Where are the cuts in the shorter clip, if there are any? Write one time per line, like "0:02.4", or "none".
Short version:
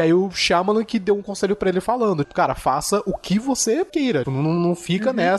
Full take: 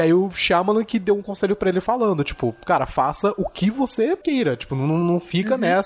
0:02.2
0:04.2